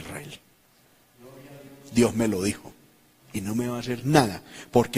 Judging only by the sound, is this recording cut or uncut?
cut